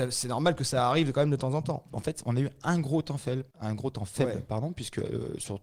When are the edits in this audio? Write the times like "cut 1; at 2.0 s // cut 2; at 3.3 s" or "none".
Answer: cut 1; at 1.9 s // cut 2; at 3.5 s